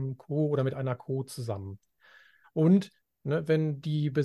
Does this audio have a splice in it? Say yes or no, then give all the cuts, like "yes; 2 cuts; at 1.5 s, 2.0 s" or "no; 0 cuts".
yes; 1 cut; at 2.4 s